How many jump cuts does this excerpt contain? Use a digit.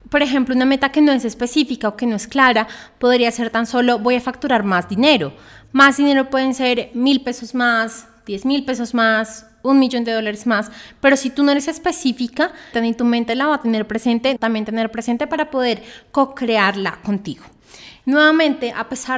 3